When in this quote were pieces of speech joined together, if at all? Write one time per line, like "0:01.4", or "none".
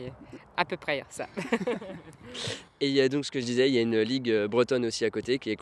none

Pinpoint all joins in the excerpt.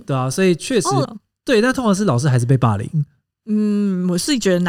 0:01.0

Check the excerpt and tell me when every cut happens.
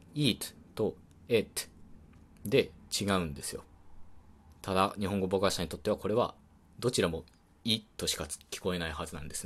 none

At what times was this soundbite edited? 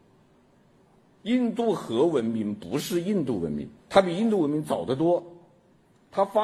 0:01.2
0:03.8

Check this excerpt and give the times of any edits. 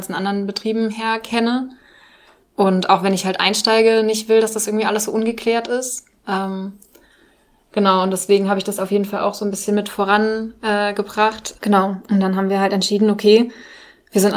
0:11.6

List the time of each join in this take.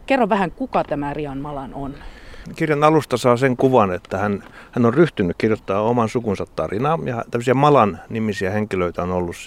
none

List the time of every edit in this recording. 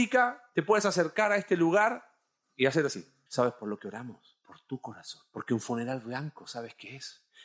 0:03.3

